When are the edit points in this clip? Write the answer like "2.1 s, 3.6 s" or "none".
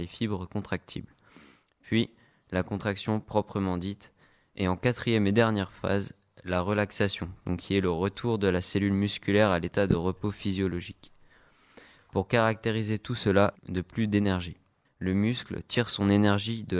13.6 s, 14.9 s